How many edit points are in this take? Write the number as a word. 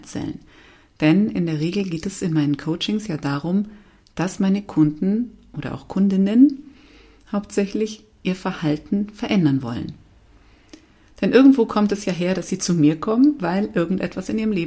zero